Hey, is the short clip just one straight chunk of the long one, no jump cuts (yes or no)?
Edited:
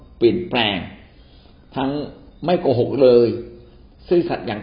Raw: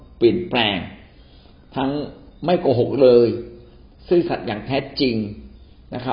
yes